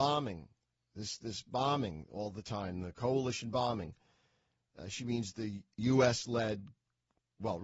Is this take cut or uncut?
uncut